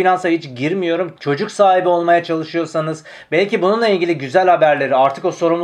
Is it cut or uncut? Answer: cut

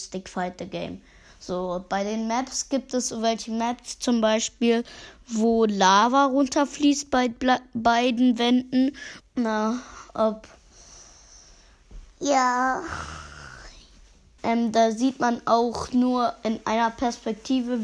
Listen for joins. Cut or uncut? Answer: cut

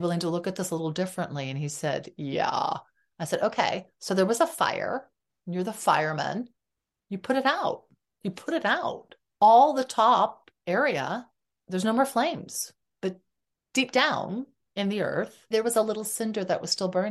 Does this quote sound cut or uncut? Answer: cut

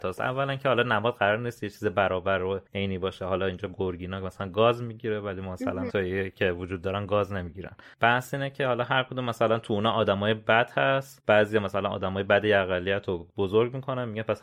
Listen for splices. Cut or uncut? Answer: cut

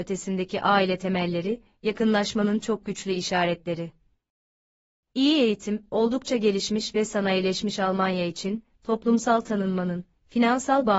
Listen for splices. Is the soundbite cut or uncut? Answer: uncut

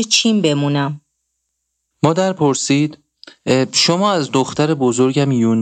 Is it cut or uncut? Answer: cut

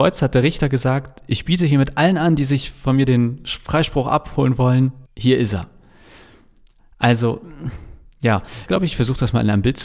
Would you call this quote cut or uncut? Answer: cut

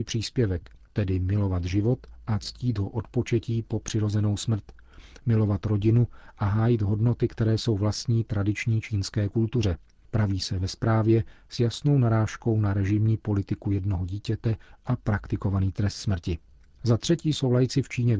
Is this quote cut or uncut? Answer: uncut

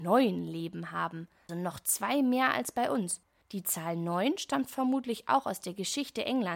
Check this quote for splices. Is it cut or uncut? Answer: cut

